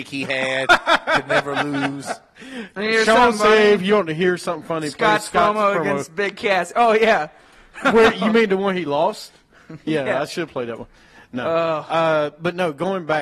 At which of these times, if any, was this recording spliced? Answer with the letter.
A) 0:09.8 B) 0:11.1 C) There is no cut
C